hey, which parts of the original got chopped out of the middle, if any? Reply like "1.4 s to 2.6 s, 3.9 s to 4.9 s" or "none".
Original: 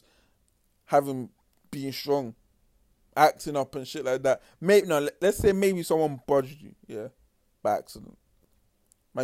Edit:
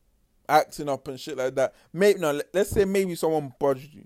none